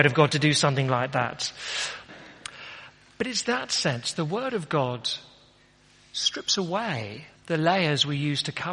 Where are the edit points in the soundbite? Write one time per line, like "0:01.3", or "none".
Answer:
0:02.1
0:07.4

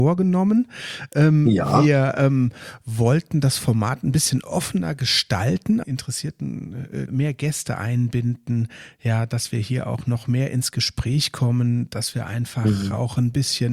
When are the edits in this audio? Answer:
0:05.8
0:07.1

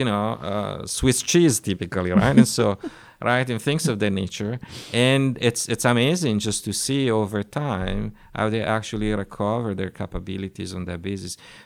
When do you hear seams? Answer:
none

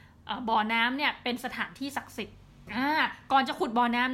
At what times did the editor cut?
0:02.7

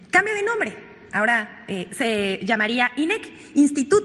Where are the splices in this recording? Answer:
none

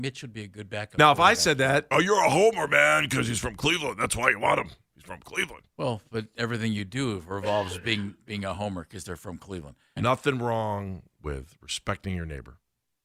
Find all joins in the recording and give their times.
0:01.9
0:10.0

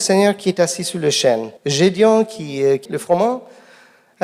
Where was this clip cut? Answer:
0:01.6
0:02.9

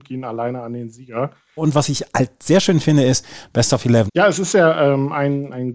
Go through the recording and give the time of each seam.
0:01.6
0:04.1

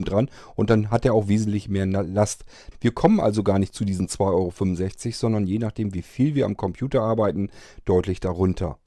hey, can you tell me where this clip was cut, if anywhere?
0:02.7

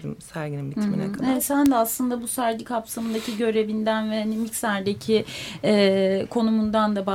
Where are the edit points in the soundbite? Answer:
none

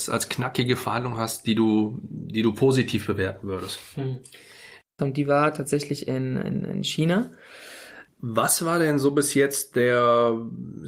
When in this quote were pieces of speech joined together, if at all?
0:05.0
0:08.1

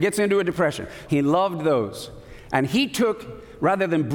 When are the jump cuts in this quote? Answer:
0:01.1

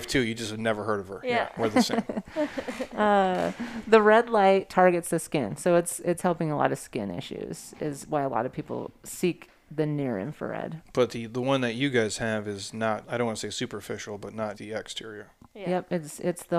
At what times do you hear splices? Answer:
0:13.0
0:14.5

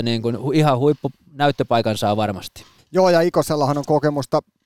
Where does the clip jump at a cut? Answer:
0:02.8

